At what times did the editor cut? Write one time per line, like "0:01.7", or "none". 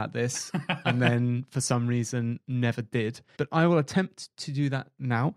0:03.4